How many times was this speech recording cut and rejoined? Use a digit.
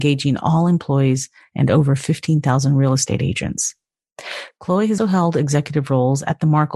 1